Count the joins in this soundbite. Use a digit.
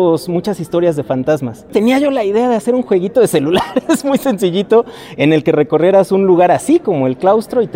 1